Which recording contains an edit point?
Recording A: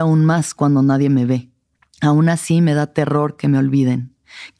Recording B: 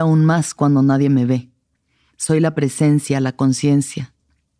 A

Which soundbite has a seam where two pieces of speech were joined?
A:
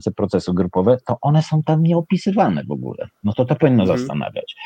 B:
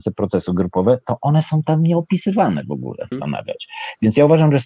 B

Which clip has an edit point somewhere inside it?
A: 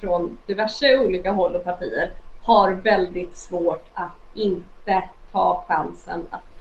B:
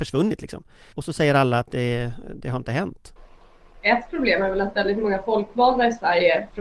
B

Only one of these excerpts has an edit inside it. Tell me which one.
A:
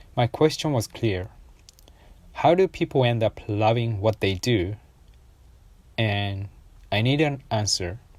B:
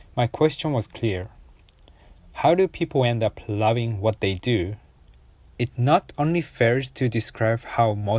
B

